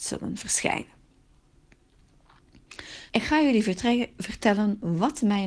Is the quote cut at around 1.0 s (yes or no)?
no